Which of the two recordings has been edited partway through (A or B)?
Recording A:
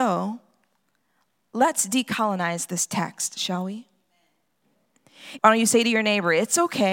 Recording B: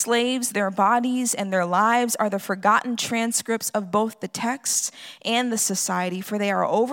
A